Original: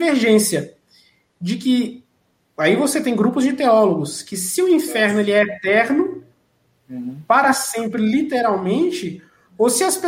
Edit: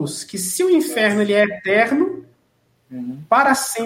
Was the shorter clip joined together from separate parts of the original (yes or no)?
no